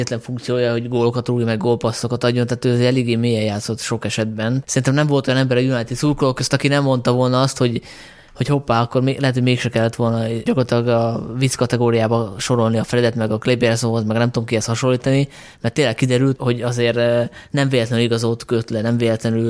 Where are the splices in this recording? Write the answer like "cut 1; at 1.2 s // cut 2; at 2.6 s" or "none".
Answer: cut 1; at 10.5 s // cut 2; at 16.4 s